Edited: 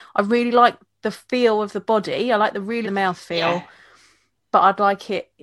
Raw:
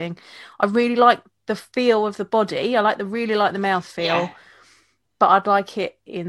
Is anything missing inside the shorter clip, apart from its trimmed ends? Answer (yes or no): yes